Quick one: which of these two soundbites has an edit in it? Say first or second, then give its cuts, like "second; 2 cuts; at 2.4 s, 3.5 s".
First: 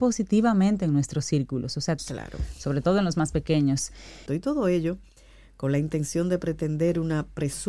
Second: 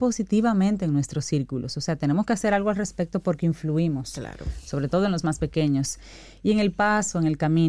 first; 2 cuts; at 2.0 s, 4.3 s